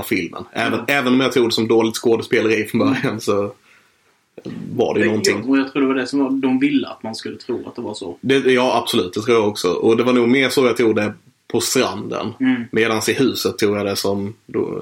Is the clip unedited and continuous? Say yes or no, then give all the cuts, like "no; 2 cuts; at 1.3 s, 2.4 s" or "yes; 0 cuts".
no; 1 cut; at 5.4 s